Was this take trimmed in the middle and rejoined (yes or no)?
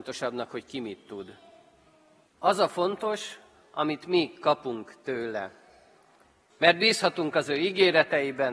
yes